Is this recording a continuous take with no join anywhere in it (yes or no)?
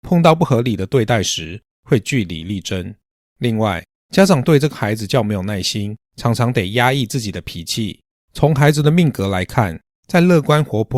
no